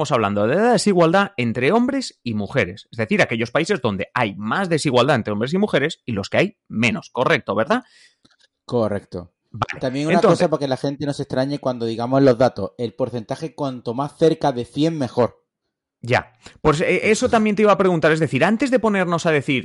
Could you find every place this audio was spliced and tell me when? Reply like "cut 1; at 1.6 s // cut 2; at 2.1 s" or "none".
none